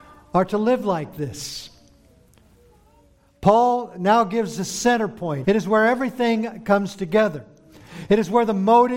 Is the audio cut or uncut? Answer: cut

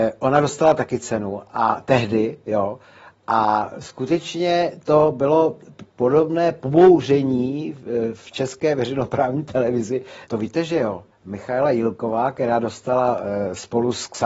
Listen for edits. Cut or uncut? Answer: cut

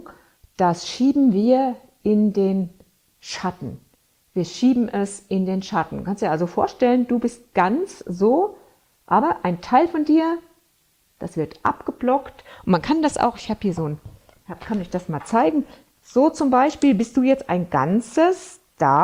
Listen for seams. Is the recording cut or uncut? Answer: uncut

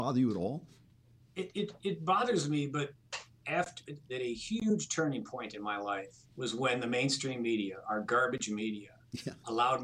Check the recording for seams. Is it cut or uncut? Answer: cut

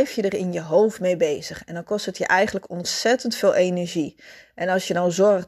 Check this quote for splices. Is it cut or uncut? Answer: uncut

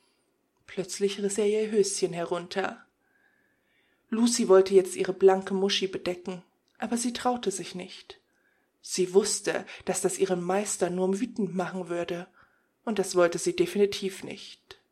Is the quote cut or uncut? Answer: uncut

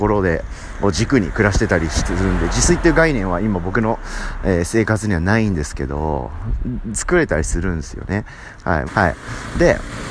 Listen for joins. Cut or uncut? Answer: cut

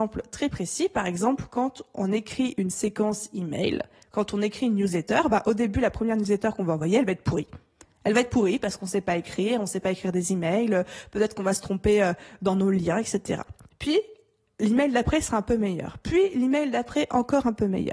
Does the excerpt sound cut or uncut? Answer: uncut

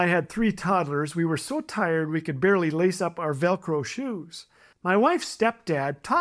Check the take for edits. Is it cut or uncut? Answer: cut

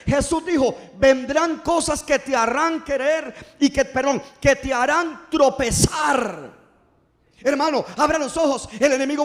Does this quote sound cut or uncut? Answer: cut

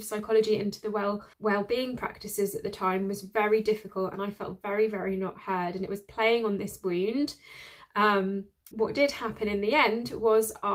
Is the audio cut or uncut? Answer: cut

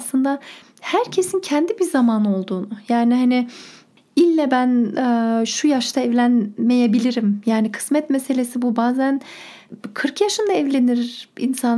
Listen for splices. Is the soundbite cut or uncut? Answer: cut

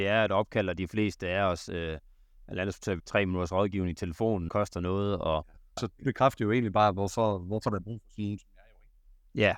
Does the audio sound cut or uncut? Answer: cut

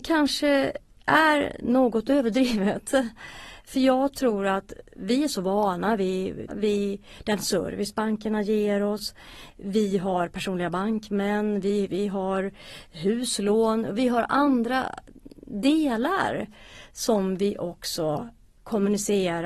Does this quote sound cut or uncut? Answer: cut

